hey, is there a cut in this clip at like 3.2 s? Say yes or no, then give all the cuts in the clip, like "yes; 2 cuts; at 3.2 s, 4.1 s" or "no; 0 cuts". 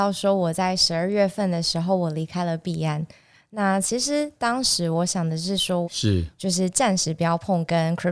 no; 1 cut; at 5.8 s